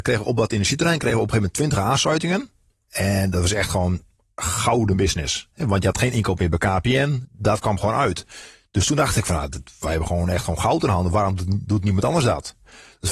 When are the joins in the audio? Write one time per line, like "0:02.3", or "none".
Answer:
0:07.2